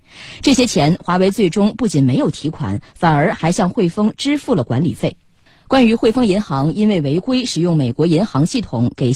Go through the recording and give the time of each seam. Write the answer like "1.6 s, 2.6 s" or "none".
none